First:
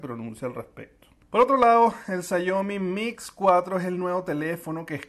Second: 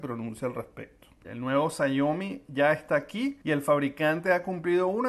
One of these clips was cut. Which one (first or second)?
second